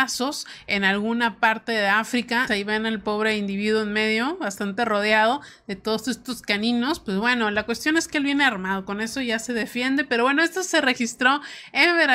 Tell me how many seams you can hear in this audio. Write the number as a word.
one